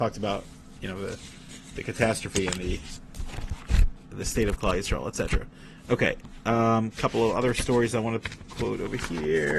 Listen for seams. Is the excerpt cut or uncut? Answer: uncut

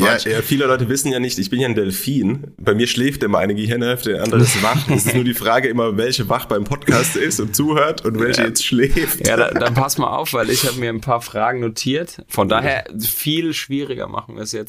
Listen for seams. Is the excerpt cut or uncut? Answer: cut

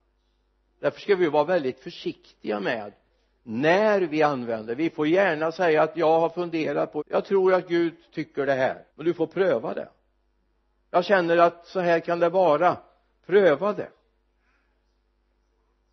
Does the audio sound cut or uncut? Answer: cut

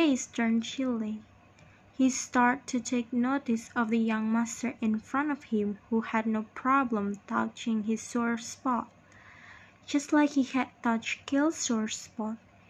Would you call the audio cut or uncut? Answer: uncut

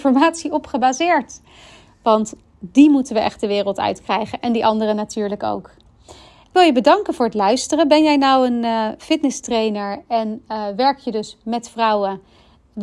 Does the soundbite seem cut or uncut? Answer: uncut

